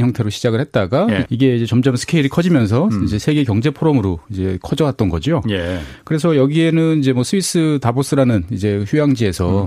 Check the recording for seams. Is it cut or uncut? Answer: cut